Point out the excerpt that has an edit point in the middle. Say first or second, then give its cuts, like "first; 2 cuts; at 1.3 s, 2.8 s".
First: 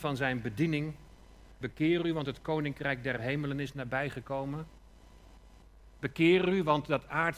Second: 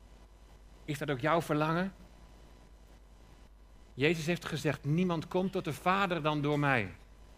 first; 1 cut; at 1.6 s